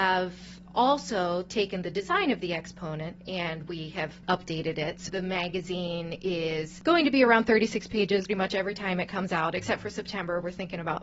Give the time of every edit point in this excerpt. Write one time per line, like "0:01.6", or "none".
0:05.1
0:08.3